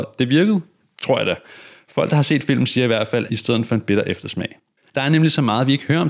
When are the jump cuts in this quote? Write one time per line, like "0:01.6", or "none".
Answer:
0:03.3
0:04.8

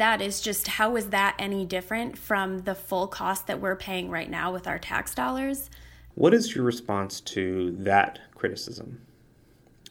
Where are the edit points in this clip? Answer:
0:06.1

